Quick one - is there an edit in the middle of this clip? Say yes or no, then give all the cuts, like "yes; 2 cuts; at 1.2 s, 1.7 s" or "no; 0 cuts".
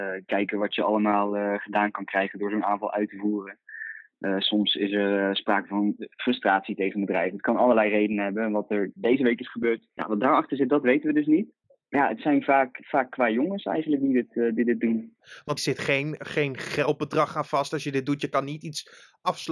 yes; 1 cut; at 15.6 s